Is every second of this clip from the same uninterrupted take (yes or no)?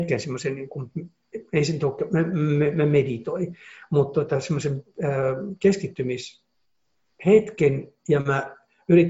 yes